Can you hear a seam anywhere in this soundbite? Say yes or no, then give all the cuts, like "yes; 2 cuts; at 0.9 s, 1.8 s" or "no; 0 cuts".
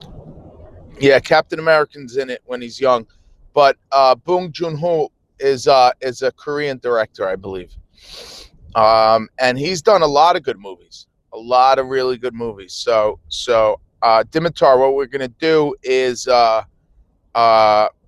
no; 0 cuts